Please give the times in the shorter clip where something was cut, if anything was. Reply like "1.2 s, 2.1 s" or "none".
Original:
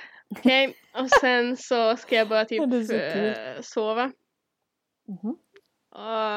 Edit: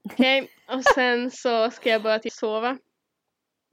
2.3 s

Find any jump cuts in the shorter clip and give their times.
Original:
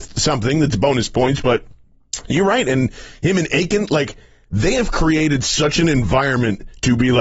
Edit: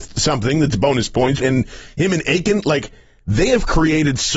1.4 s

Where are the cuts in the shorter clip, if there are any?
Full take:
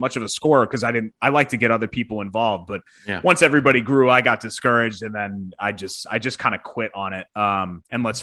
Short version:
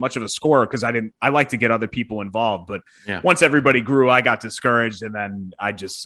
none

